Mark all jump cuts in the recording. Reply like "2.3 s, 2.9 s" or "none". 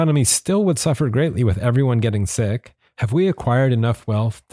2.9 s